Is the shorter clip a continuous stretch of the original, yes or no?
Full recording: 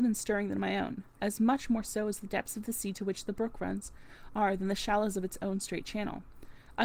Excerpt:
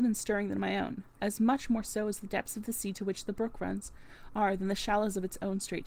yes